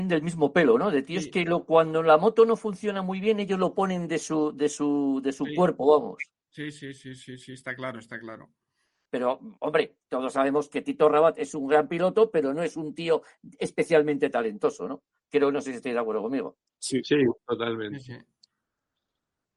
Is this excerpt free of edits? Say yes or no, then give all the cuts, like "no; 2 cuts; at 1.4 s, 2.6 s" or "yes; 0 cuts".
no; 1 cut; at 9.1 s